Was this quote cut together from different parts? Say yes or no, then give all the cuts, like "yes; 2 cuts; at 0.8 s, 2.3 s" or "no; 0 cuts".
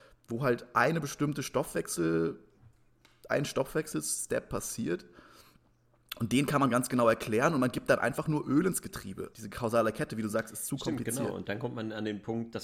yes; 2 cuts; at 9.3 s, 11.4 s